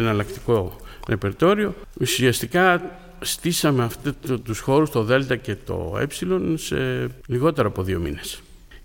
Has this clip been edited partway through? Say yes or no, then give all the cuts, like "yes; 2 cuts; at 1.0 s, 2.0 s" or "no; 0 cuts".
no; 0 cuts